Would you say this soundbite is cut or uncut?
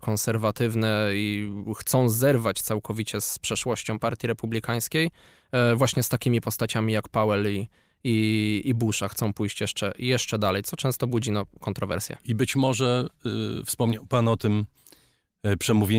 uncut